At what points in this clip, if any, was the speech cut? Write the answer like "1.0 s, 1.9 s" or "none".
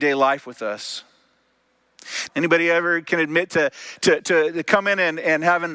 2.3 s